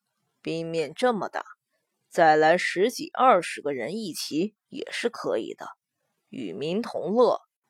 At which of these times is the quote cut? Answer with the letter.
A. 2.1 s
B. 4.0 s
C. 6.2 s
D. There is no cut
C